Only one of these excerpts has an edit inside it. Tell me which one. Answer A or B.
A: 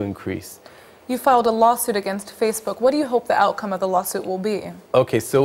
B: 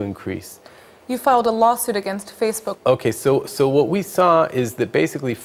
B